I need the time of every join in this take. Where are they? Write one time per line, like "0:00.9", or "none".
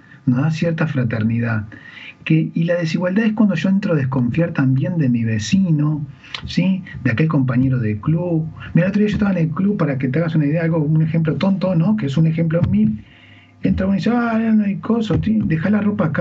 none

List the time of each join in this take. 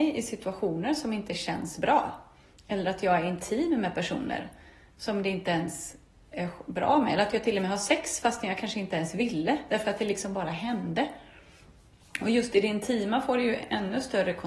none

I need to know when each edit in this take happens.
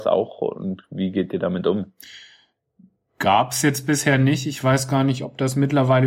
none

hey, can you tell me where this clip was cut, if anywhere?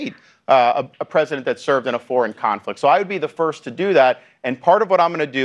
none

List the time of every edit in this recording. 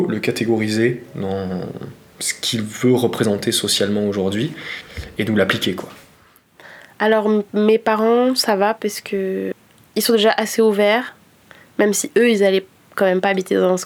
none

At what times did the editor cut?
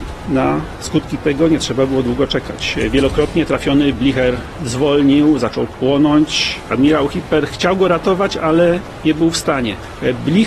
0:06.7

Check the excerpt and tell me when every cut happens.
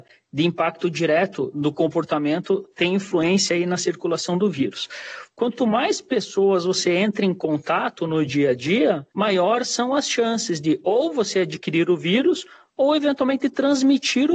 0:05.3
0:09.1

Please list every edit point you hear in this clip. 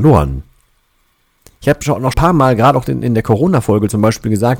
0:02.1

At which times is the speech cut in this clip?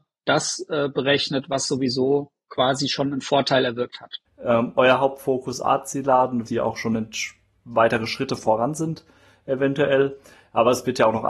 0:04.3
0:06.5

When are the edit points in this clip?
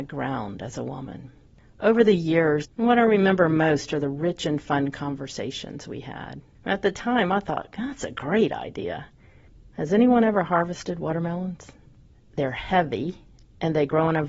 0:02.6
0:06.5

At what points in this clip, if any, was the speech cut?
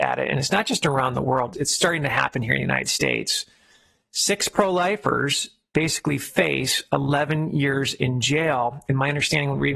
0:01.5

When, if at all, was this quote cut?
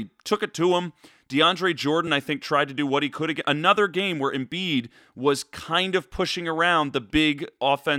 none

